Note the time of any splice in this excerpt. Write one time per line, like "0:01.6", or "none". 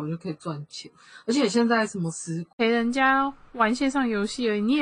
0:02.5